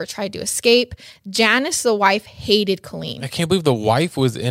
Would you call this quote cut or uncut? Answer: uncut